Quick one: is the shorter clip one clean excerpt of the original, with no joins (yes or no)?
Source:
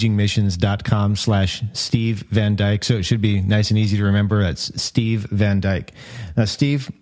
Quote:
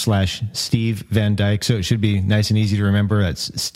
yes